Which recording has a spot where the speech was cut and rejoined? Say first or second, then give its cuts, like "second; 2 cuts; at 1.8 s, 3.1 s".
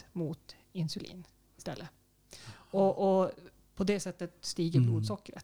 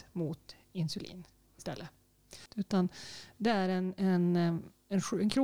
second; 1 cut; at 2.5 s